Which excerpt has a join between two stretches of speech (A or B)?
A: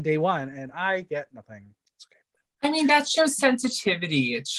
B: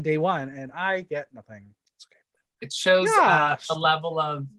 B